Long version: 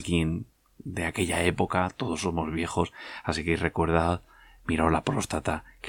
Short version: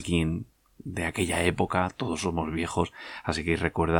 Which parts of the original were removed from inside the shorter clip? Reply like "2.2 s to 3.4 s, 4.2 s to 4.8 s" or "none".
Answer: none